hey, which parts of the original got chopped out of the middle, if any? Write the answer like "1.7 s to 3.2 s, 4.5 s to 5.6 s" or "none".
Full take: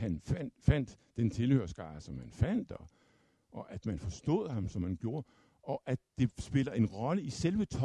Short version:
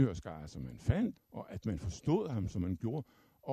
2.7 s to 3.3 s